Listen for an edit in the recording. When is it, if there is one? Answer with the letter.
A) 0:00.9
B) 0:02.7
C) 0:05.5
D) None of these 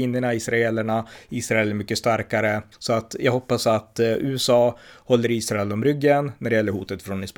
B